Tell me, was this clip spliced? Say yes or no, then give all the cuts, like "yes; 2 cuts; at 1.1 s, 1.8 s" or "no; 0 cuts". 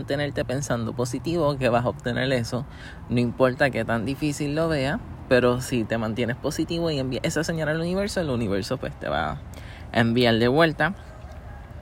no; 0 cuts